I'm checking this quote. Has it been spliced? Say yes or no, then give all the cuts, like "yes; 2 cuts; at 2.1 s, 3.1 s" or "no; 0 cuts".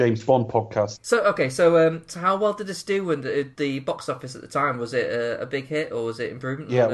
yes; 1 cut; at 0.9 s